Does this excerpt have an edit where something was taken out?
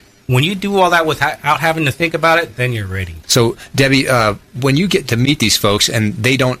yes; 1 cut; at 3.2 s

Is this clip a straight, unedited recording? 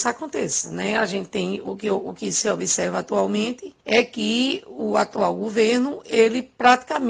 no; 2 cuts; at 1.6 s, 3.8 s

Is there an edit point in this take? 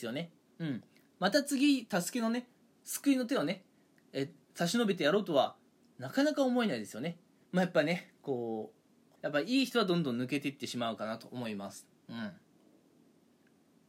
yes; 2 cuts; at 7.4 s, 9.1 s

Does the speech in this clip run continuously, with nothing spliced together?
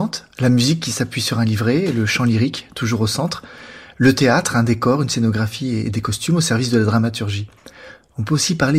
yes; 0 cuts

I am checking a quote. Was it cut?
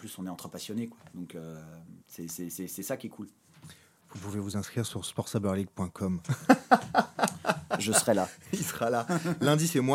yes; 1 cut; at 2.0 s

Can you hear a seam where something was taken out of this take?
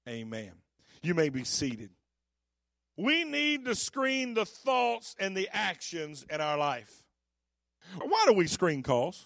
yes; 2 cuts; at 3.0 s, 8.0 s

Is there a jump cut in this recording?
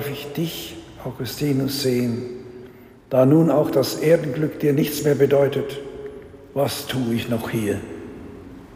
no; 0 cuts

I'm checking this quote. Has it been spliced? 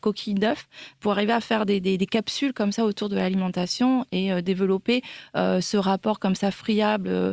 no; 0 cuts

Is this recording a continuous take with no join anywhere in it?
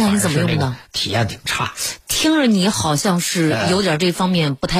yes; 0 cuts

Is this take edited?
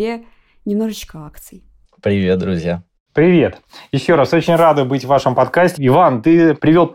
yes; 1 cut; at 5.8 s

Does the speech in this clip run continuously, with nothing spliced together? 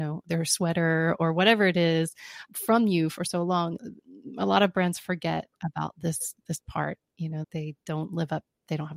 no; 2 cuts; at 2.5 s, 7.4 s

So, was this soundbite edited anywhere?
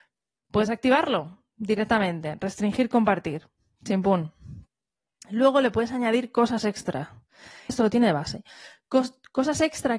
yes; 1 cut; at 7.7 s

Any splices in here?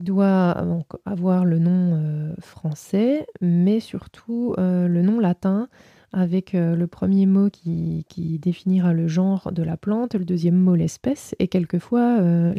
no; 0 cuts

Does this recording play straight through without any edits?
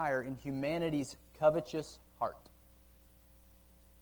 yes; 0 cuts

